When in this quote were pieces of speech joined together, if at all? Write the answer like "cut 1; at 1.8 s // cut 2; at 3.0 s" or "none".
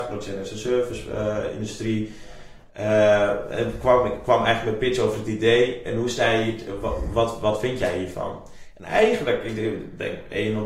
none